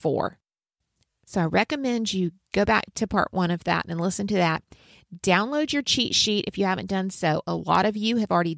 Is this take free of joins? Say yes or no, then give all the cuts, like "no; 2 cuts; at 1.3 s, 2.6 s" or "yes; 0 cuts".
yes; 0 cuts